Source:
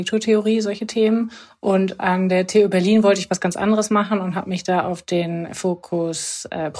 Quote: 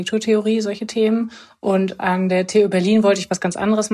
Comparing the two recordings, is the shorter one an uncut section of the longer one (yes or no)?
yes